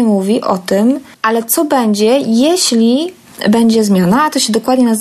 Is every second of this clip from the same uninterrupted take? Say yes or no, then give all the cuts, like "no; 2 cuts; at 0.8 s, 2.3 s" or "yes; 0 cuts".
no; 1 cut; at 1.1 s